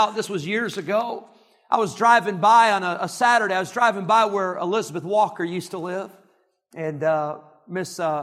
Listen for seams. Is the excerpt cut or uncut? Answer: uncut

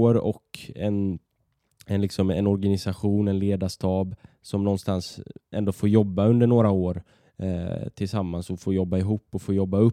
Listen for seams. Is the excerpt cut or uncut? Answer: uncut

